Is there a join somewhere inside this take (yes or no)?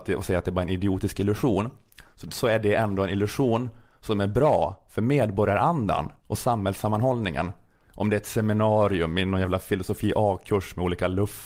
yes